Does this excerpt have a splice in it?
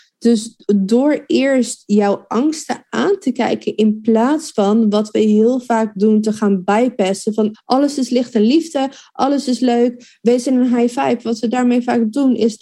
yes; 1 cut; at 7.5 s

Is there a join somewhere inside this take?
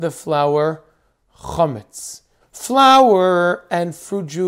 yes; 1 cut; at 2.4 s

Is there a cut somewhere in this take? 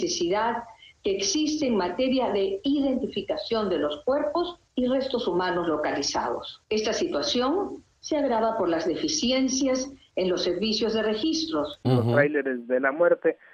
yes; 1 cut; at 11.8 s

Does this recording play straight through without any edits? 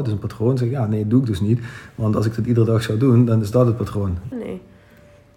no; 1 cut; at 4.3 s

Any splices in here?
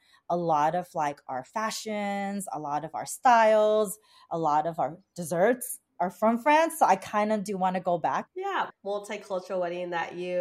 yes; 1 cut; at 8.7 s

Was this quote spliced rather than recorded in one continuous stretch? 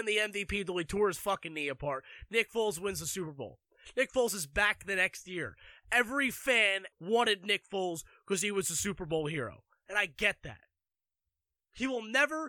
yes; 1 cut; at 6.9 s

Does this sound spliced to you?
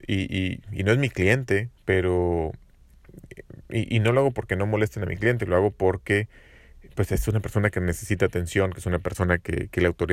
no; 0 cuts

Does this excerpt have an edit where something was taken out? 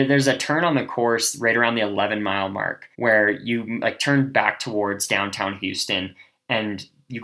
yes; 1 cut; at 2.9 s

